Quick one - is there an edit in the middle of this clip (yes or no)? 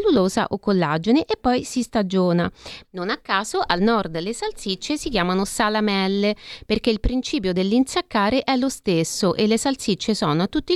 yes